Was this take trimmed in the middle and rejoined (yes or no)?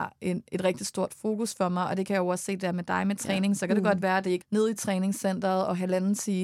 yes